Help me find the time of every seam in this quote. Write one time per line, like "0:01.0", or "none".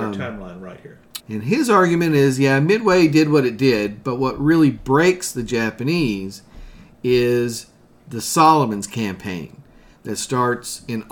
0:01.2